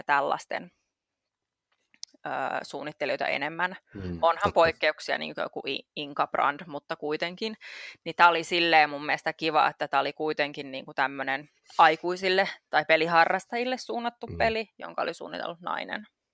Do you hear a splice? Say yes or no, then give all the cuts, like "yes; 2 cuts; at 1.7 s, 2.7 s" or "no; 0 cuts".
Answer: no; 0 cuts